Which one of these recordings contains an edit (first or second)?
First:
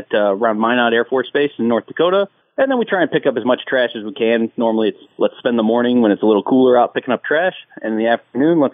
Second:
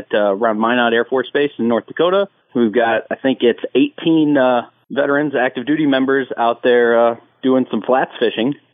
second